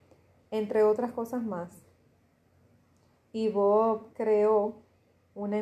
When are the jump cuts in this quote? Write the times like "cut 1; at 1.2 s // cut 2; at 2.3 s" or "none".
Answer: none